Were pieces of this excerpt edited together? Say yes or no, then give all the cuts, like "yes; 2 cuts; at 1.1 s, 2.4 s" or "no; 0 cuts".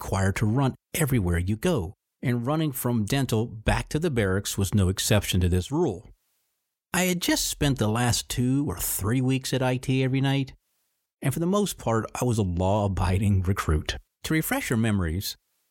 no; 0 cuts